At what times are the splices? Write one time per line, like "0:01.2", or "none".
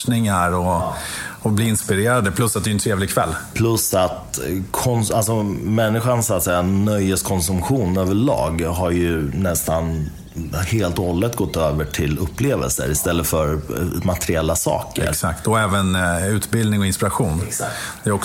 none